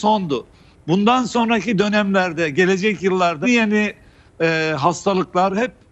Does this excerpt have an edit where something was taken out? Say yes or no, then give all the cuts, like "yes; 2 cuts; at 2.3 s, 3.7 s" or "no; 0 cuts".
yes; 1 cut; at 3.4 s